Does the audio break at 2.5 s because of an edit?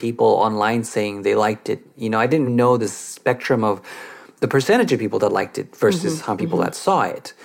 yes; 1 cut; at 2.5 s

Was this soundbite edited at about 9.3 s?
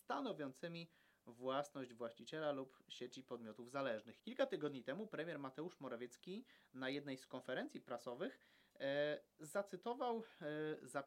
no; 1 cut; at 4.2 s

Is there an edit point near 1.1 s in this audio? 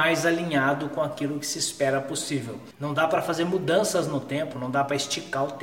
no; 2 cuts; at 2.7 s, 4.5 s

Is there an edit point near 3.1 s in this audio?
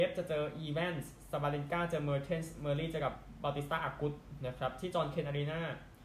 no; 0 cuts

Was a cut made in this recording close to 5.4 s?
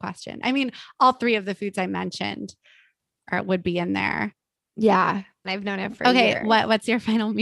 yes; 2 cuts; at 3.2 s, 5.4 s

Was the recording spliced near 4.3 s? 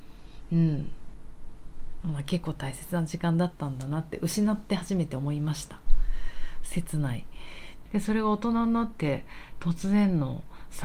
no; 2 cuts; at 2.0 s, 7.9 s

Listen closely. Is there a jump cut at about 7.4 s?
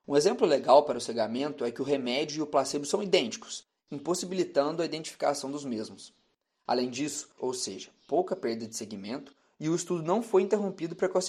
yes; 1 cut; at 7.4 s

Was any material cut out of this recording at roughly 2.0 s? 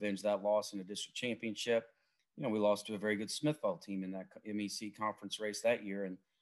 no; 0 cuts

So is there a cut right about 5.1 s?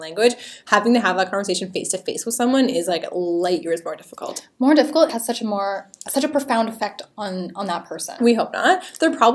yes; 2 cuts; at 5.1 s, 8.2 s

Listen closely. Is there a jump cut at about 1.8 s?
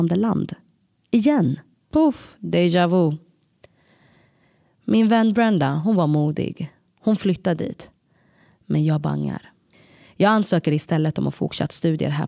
yes; 1 cut; at 1.8 s

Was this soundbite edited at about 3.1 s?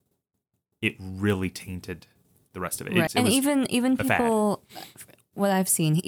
yes; 1 cut; at 3.1 s

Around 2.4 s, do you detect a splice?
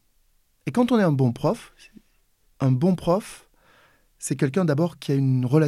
yes; 1 cut; at 2.4 s

